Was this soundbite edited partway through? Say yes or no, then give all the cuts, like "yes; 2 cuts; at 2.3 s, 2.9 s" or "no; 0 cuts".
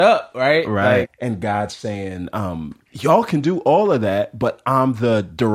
yes; 2 cuts; at 1.0 s, 2.9 s